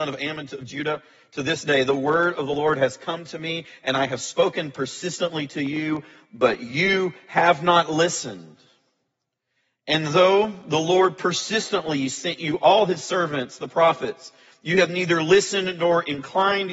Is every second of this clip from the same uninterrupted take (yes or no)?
yes